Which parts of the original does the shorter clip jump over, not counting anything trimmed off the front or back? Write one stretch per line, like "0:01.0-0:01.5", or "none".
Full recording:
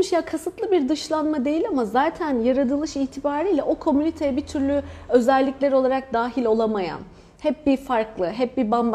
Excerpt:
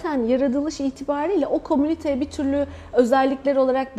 none